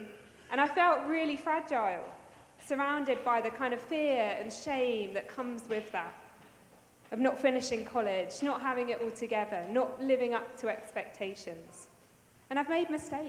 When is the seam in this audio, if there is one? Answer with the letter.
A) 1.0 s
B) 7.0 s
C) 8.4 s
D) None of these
D